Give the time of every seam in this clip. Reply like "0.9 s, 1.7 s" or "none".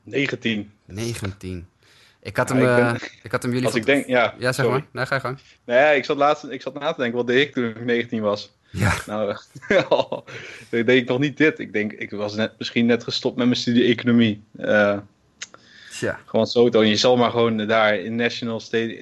3.0 s